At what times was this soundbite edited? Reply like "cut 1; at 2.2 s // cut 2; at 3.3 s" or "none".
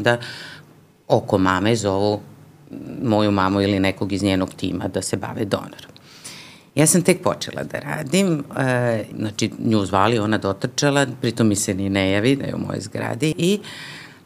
cut 1; at 9.1 s // cut 2; at 13.3 s